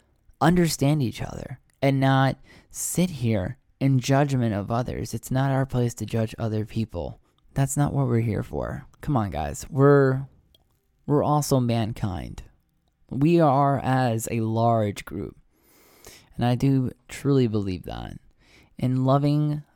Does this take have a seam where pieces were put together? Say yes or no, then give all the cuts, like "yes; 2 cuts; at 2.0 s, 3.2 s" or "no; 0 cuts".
no; 0 cuts